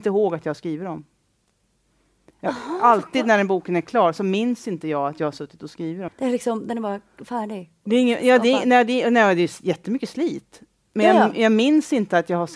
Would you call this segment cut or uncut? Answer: cut